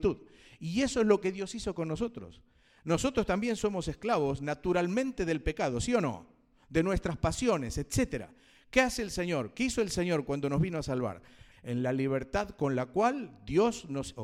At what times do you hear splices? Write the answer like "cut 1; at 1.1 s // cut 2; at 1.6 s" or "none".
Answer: cut 1; at 11.5 s